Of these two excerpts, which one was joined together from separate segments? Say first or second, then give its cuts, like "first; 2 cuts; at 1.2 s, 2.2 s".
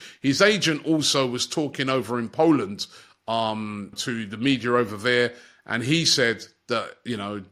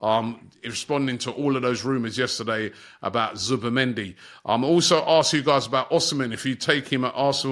first; 1 cut; at 3.9 s